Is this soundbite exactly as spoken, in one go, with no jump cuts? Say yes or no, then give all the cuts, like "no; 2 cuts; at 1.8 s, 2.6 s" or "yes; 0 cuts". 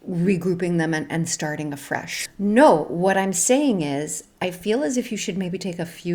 no; 1 cut; at 2.3 s